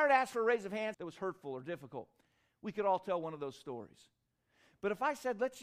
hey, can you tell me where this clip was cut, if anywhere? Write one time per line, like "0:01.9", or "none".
0:00.9